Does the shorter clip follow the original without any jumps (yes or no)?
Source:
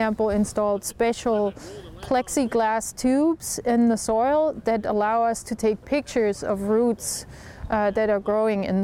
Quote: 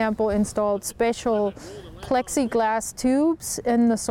yes